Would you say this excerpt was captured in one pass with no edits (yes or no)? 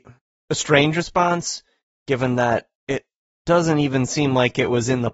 no